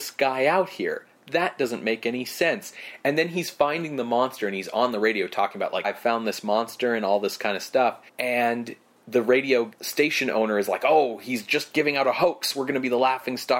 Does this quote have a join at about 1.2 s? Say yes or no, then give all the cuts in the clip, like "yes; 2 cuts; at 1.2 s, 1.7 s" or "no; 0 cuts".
no; 2 cuts; at 5.8 s, 8.1 s